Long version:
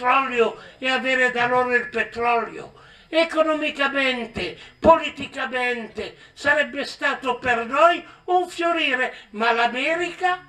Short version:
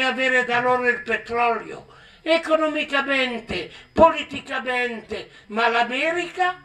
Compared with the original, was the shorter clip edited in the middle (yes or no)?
yes